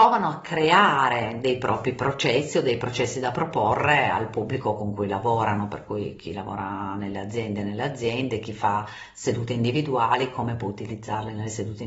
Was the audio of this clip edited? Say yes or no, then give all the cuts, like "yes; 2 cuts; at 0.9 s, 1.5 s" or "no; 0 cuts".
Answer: no; 0 cuts